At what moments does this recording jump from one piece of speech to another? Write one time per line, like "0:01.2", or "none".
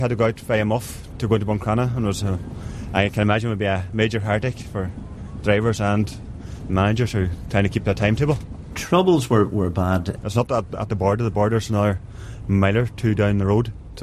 0:10.2